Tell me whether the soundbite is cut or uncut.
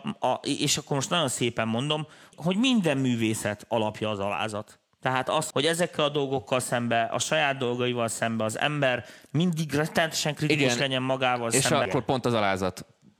cut